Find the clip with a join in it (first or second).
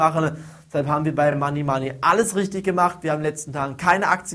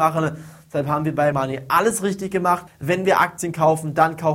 second